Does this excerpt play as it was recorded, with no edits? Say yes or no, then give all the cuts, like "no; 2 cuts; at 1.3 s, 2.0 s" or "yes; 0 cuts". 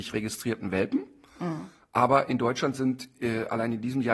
yes; 0 cuts